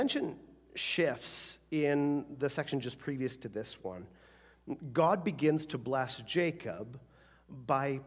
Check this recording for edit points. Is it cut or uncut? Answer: uncut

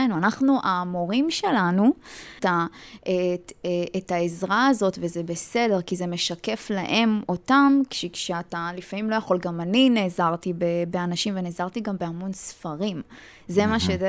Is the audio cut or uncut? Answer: cut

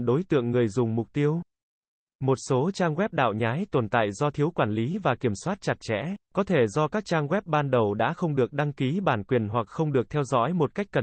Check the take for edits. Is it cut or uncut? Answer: cut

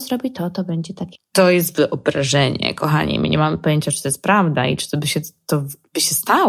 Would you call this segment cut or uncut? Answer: cut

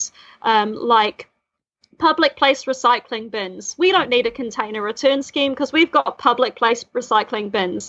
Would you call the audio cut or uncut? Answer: uncut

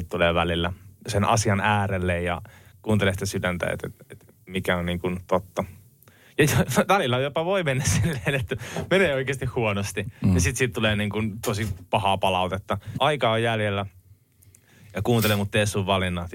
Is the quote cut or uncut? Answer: cut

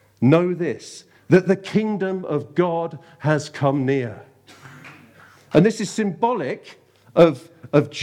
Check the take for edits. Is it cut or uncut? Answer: uncut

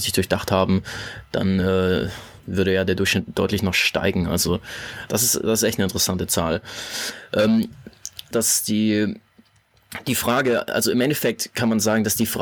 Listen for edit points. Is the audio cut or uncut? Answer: cut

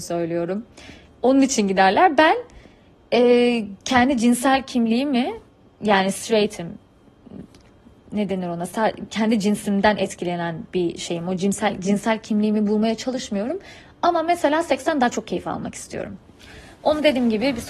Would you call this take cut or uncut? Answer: uncut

